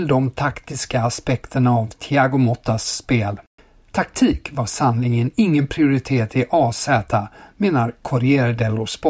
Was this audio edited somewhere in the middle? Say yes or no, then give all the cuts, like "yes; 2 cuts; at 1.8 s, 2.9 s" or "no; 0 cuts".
no; 0 cuts